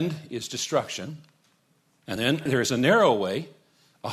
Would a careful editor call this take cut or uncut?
uncut